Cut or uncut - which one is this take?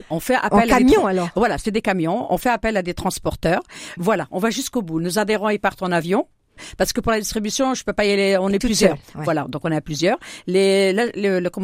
cut